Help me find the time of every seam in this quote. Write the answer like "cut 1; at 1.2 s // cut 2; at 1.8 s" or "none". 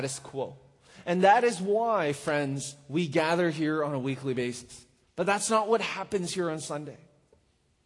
cut 1; at 5.0 s